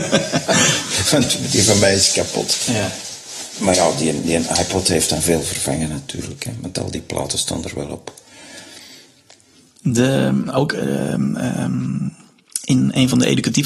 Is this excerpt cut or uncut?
uncut